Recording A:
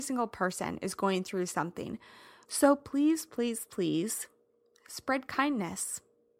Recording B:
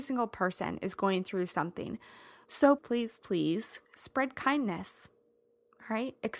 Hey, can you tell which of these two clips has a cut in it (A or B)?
B